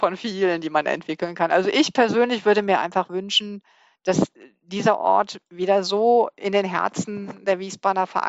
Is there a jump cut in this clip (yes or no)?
no